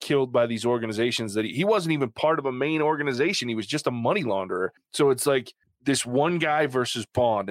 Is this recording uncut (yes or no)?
yes